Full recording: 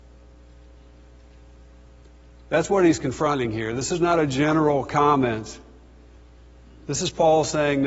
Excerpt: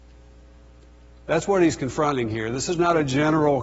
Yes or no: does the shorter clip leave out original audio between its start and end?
no